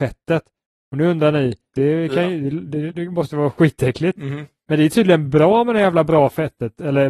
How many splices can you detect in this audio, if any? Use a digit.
2